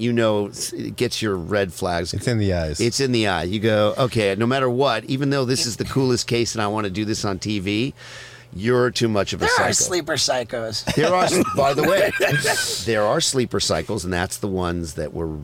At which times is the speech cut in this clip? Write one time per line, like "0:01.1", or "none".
none